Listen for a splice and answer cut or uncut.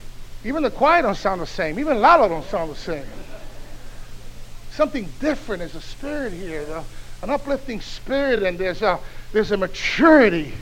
uncut